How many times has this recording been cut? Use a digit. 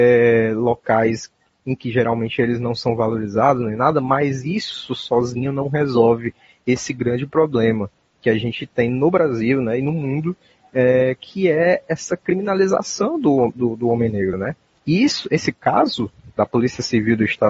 0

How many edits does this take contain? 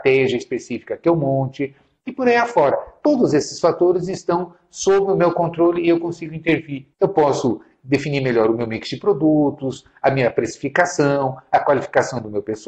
1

